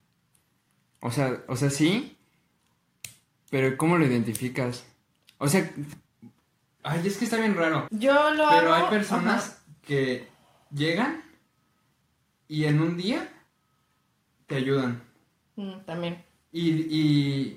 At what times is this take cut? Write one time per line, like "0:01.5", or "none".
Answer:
0:07.9